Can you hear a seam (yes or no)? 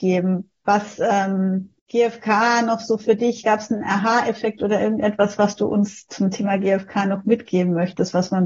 yes